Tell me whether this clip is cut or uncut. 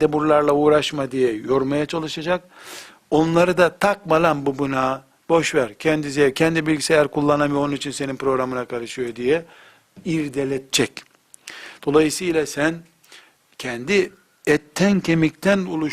uncut